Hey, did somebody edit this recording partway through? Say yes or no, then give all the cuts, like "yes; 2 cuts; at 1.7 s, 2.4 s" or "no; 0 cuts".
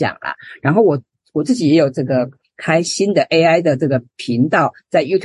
yes; 1 cut; at 4.1 s